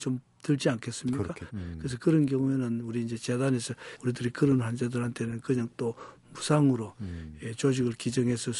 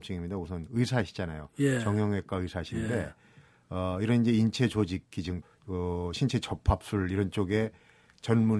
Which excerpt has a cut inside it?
first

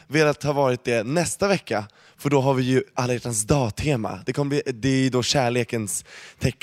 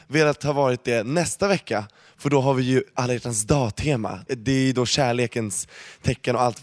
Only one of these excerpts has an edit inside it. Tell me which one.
second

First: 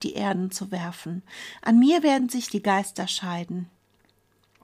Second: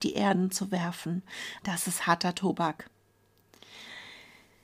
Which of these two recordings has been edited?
second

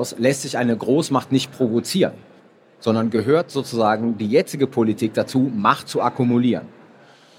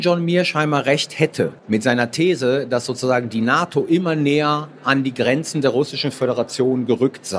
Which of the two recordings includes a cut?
second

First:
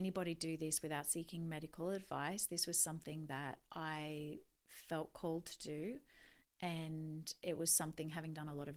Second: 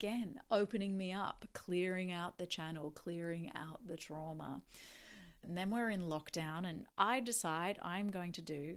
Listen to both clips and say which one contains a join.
second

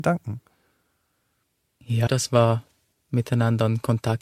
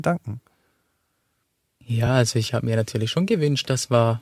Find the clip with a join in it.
first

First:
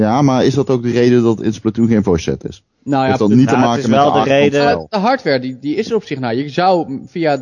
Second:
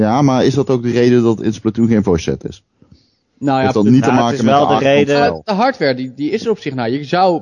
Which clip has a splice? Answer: first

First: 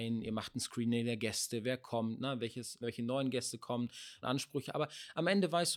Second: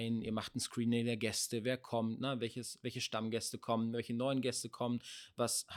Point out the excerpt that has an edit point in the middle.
first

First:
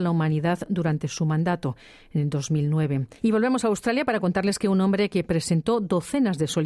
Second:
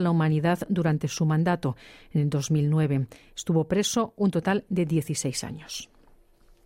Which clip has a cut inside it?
first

